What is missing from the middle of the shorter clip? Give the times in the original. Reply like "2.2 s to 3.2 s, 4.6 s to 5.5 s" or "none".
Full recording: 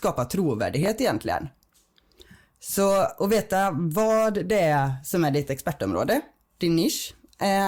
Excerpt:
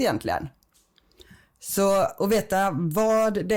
none